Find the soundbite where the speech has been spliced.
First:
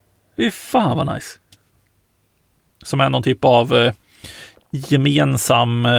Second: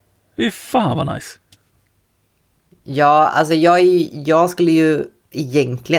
first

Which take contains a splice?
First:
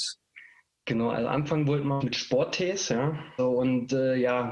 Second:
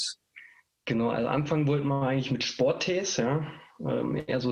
first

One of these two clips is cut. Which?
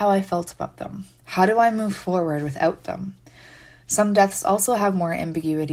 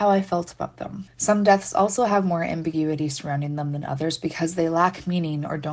second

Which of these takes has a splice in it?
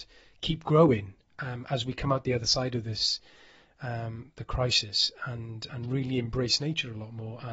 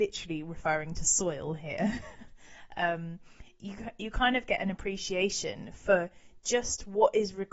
first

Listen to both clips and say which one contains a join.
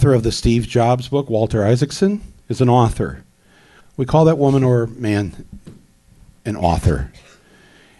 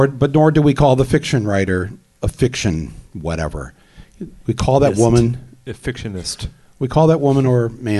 first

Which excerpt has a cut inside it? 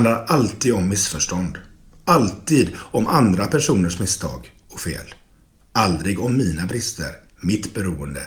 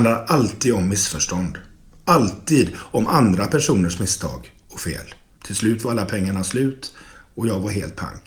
second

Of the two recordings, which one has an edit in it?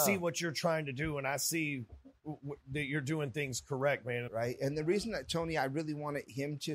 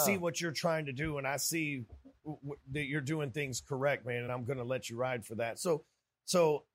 first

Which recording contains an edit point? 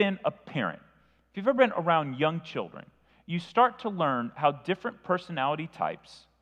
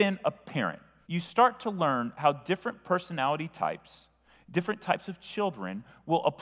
second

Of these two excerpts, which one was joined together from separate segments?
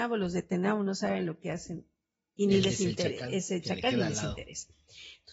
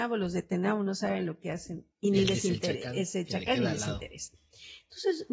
second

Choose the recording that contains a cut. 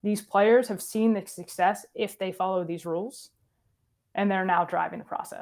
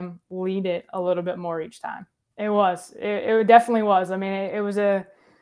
second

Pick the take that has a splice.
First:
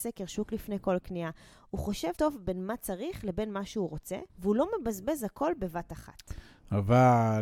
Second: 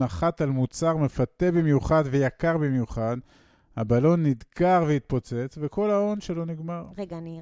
first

